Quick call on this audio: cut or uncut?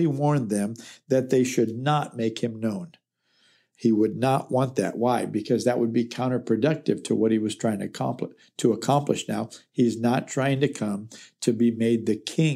uncut